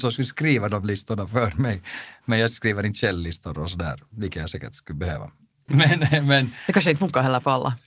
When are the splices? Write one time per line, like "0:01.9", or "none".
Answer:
0:05.7